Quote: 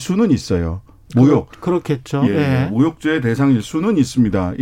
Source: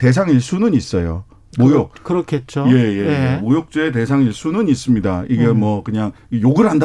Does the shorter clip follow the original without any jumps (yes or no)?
no